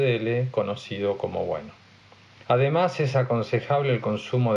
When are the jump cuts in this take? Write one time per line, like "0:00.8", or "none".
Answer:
0:02.4